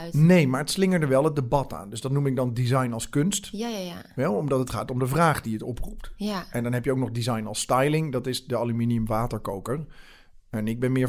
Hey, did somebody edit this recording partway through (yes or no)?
no